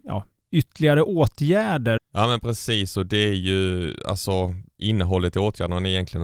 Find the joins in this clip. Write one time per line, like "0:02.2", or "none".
0:02.0

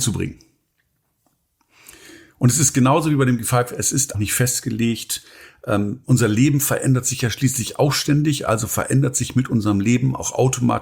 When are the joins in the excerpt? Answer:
0:04.1

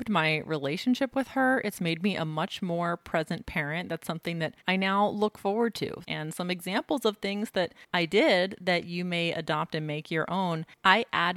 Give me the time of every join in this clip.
0:04.6
0:06.0
0:07.8

